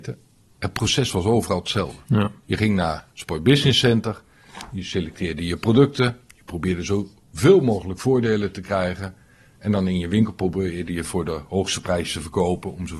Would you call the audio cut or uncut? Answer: uncut